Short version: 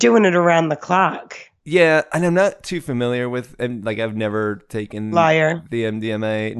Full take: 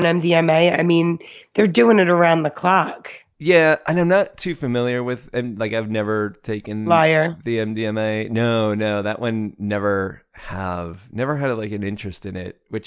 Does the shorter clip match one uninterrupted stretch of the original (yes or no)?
yes